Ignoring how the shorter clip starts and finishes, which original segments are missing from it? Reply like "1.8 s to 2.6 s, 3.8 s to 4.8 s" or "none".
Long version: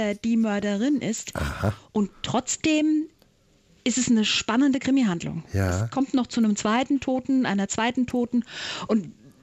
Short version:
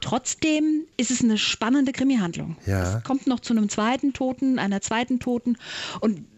3.1 s to 3.8 s

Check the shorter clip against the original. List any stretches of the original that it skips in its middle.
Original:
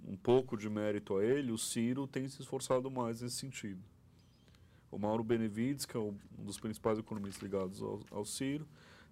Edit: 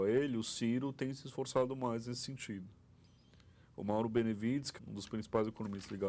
5.9 s to 6.3 s

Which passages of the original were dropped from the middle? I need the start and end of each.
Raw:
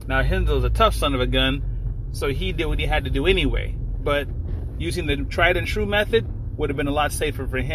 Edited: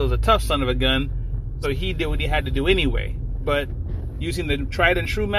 2.1 s to 2.2 s

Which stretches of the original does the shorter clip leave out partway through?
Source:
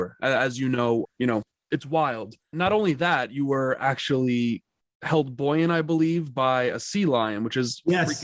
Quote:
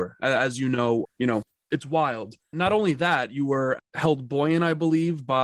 3.8 s to 4.9 s

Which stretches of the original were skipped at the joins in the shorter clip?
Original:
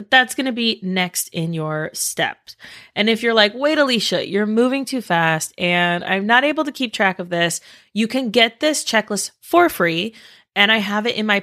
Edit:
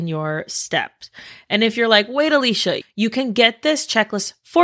4.3 s to 7.8 s

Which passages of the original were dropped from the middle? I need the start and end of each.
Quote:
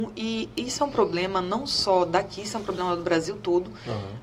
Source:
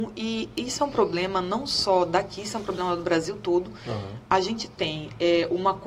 none

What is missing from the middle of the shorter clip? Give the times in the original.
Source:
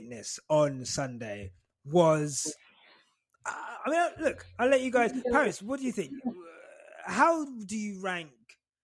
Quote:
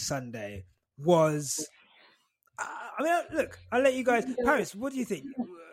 none

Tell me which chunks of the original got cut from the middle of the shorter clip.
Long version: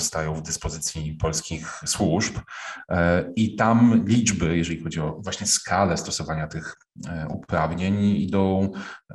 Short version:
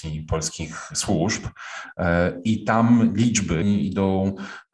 4.5 s to 8.0 s

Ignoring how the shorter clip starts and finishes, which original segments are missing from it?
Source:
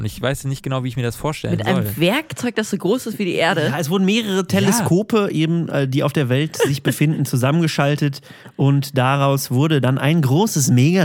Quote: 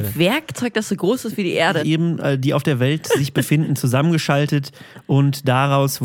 3.6 s to 5.3 s

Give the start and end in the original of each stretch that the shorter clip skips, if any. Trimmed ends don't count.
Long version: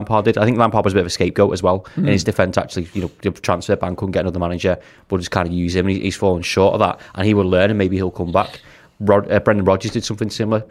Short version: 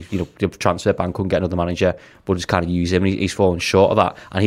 none

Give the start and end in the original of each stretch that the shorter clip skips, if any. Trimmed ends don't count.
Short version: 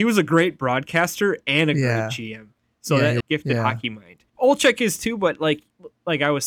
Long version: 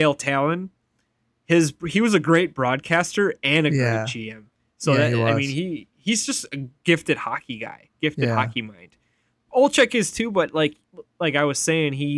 5.2 s to 7.9 s, 9.0 s to 9.4 s

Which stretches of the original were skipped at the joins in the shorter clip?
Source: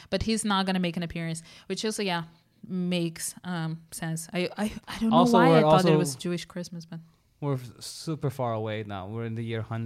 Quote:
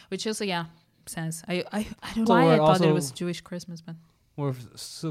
2.6 s to 3.9 s, 5.1 s to 5.3 s

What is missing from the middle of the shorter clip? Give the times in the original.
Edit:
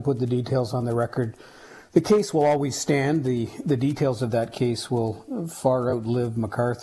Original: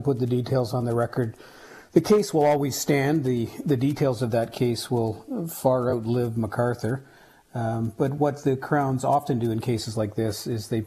none

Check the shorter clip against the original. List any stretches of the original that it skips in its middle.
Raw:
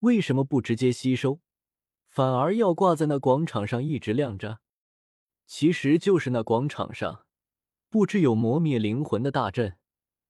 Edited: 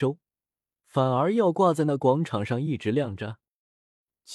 none

